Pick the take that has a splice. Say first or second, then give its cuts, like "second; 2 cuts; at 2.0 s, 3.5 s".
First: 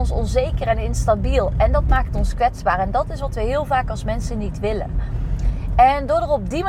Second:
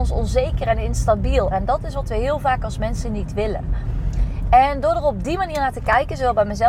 second; 1 cut; at 1.5 s